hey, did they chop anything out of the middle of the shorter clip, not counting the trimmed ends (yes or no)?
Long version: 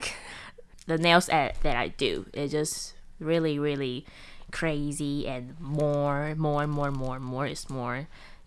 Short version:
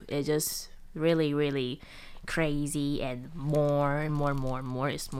yes